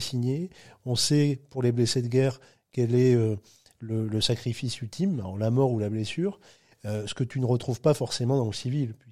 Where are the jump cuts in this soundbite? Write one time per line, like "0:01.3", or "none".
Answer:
0:06.7